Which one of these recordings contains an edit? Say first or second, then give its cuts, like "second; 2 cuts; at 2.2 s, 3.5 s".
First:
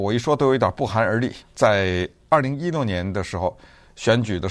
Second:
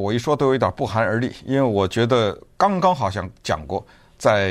first; 1 cut; at 1.4 s